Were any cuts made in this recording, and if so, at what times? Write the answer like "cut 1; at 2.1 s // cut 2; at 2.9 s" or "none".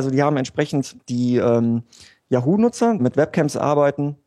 cut 1; at 1.0 s // cut 2; at 3.0 s